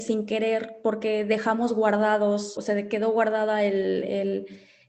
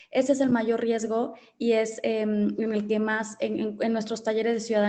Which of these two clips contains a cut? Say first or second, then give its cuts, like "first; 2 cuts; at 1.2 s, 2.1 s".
first; 1 cut; at 2.6 s